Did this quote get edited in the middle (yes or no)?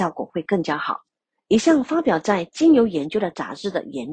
no